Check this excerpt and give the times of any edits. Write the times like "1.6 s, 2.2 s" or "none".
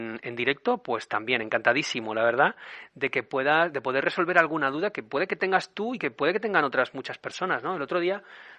none